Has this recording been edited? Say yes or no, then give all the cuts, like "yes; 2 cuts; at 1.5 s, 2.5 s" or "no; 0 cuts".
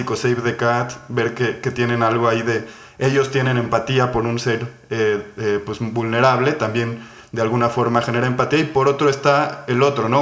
no; 0 cuts